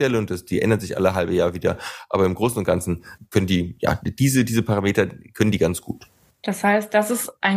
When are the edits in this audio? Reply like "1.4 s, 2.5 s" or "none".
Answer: none